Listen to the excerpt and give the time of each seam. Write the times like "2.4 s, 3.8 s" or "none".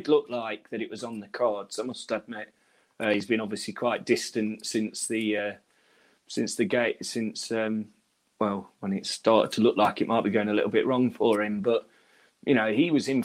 none